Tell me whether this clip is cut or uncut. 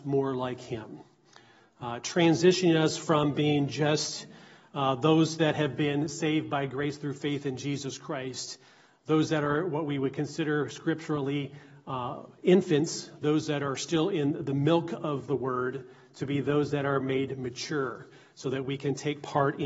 uncut